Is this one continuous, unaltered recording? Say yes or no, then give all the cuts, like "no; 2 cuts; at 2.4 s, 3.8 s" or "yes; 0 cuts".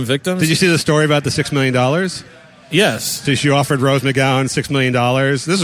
yes; 0 cuts